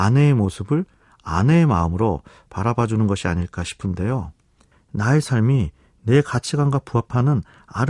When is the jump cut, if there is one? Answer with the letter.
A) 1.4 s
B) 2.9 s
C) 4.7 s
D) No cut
C